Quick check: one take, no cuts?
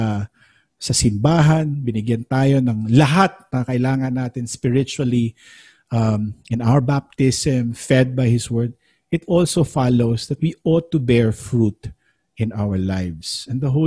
yes; 0 cuts

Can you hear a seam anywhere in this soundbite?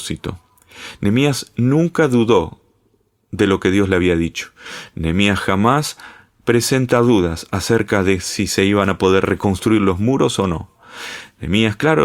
no; 0 cuts

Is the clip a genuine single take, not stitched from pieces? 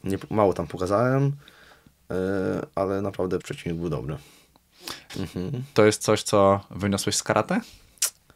no; 2 cuts; at 3.4 s, 5.1 s

